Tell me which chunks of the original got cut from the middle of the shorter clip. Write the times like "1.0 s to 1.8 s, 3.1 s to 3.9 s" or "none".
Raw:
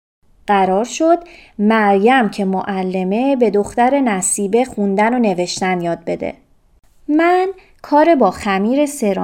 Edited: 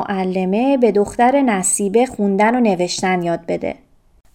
none

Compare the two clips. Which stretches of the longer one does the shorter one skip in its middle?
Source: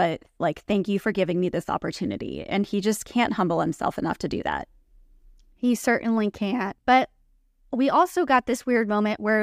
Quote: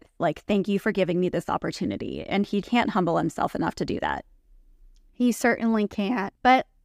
2.8 s to 3.0 s

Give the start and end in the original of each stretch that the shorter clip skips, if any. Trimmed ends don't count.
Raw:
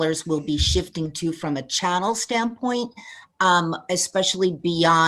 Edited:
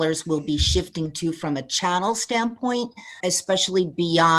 3.2 s to 3.9 s

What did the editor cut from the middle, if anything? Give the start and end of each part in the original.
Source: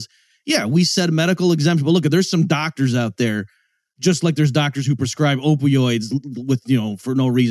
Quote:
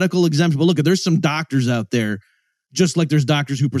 none

